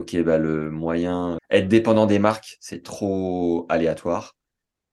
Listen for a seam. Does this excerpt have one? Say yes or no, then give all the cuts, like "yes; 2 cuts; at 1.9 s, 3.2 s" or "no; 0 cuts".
yes; 1 cut; at 1.4 s